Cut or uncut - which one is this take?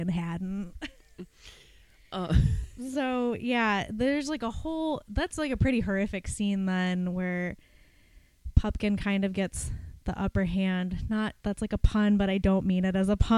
uncut